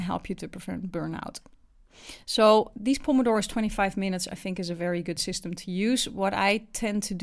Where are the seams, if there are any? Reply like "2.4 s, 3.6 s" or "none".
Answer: none